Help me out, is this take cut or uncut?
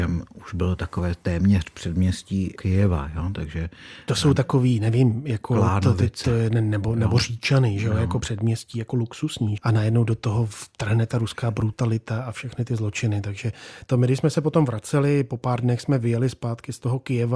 cut